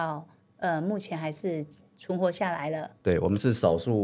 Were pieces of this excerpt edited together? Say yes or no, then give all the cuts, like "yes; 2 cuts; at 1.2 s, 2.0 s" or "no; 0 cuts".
no; 0 cuts